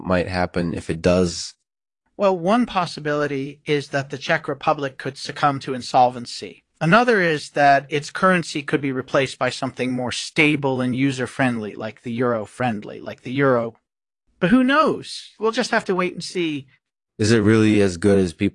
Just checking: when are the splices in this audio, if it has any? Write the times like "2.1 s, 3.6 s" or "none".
15.4 s, 17.1 s